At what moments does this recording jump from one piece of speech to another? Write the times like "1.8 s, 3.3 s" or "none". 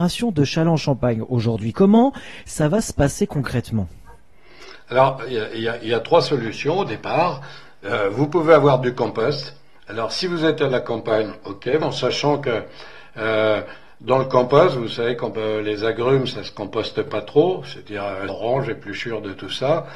11.8 s, 18.3 s